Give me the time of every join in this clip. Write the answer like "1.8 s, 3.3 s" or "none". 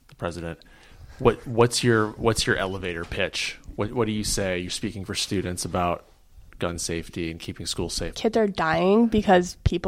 6.5 s, 8.1 s